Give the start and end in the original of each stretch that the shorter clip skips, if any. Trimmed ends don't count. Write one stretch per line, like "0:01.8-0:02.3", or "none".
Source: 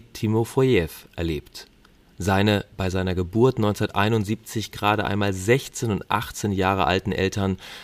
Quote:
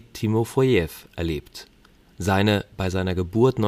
none